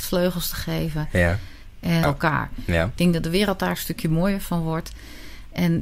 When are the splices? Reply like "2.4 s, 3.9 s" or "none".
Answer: 2.0 s